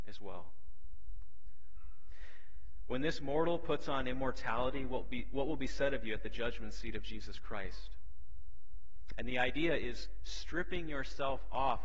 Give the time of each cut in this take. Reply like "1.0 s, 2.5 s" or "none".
9.1 s